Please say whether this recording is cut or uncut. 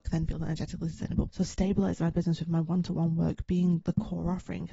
cut